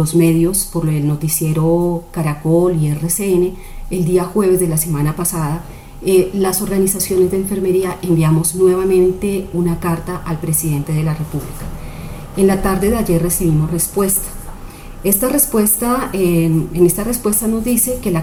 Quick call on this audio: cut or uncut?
uncut